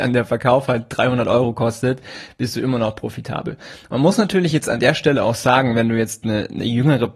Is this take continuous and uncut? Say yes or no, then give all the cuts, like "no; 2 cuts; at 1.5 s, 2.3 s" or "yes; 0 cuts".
yes; 0 cuts